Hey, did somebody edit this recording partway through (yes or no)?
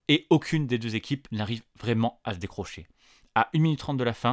no